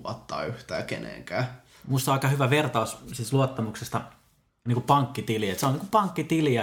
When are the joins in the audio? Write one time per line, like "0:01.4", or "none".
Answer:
none

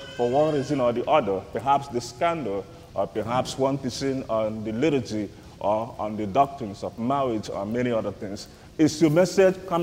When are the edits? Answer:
0:08.7

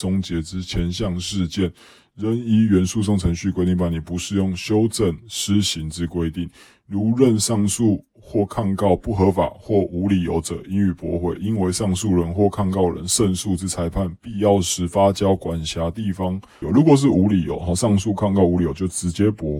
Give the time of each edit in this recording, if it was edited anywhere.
0:11.4
0:16.6

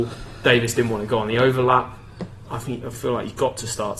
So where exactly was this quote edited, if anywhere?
0:02.5

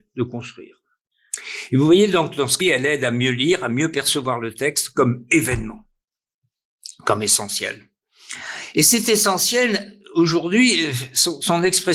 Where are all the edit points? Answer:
0:02.6

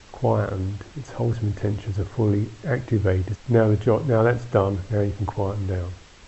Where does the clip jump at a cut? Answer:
0:03.4

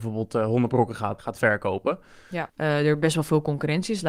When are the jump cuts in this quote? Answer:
0:01.2
0:02.5

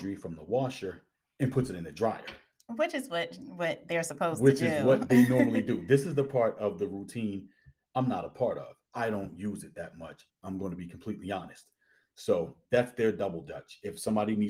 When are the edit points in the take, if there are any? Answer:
0:08.9
0:10.3

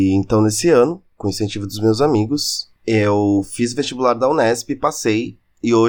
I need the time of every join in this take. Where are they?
0:01.1
0:02.8

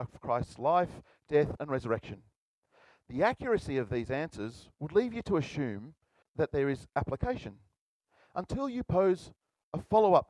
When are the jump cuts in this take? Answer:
0:01.6

